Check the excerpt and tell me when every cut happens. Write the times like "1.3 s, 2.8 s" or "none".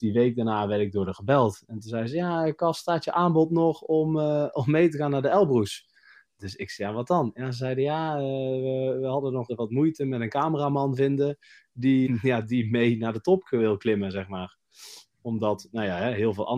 9.5 s, 12.1 s

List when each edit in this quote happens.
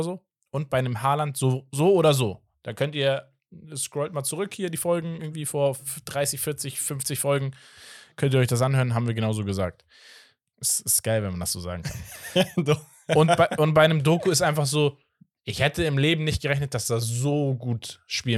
none

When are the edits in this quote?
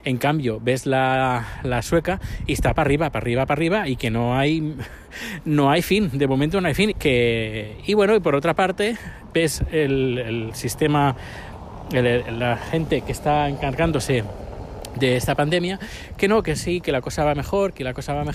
6.9 s

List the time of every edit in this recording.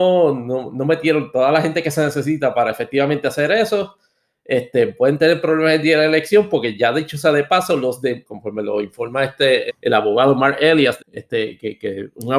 8.2 s, 9.7 s, 11.0 s

